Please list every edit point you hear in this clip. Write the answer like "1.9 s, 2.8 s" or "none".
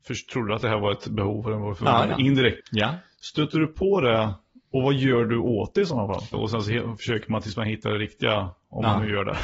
2.6 s, 6.3 s